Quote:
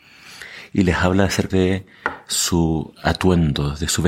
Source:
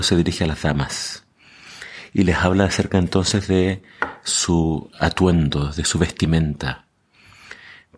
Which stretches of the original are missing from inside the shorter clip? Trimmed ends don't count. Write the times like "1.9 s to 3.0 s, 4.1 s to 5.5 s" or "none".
2.9 s to 3.5 s